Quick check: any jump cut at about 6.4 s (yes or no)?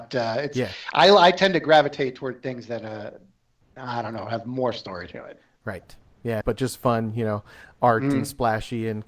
yes